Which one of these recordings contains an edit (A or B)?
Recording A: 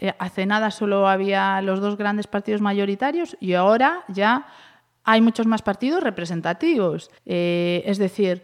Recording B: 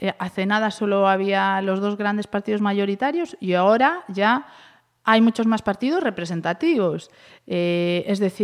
A